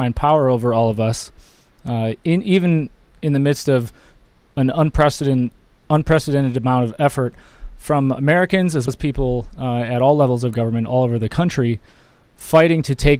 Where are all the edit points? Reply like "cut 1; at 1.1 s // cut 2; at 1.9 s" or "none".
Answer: cut 1; at 8.9 s